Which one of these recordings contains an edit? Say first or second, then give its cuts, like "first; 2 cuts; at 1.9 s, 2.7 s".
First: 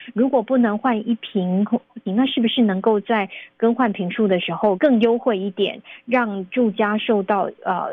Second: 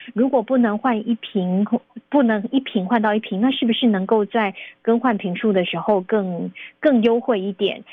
first; 2 cuts; at 2.1 s, 4.8 s